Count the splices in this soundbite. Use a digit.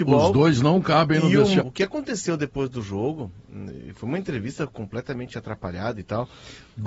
1